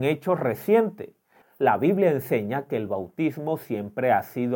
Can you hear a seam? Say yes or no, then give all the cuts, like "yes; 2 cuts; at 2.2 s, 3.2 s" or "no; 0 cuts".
yes; 1 cut; at 1.4 s